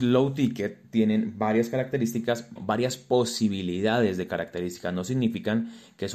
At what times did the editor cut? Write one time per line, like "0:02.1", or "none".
0:02.6